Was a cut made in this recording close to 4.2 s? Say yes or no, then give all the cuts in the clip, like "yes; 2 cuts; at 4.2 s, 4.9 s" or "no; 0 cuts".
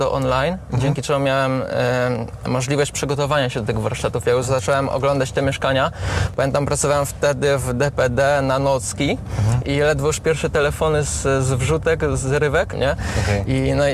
no; 2 cuts; at 9.6 s, 12.7 s